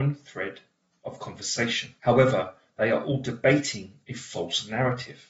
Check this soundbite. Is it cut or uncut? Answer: cut